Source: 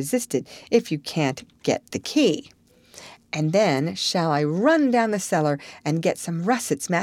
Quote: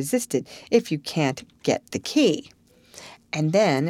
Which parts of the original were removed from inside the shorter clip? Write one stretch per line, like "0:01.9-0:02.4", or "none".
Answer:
none